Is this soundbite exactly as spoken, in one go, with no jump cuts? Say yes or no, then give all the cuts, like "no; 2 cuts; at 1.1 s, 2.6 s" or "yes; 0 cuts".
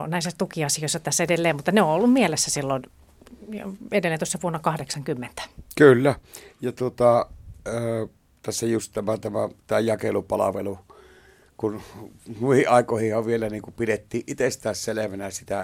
yes; 0 cuts